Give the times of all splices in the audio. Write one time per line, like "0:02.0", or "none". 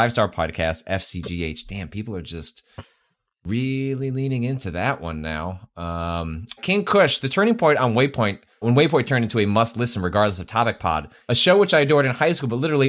0:06.6
0:08.6
0:11.3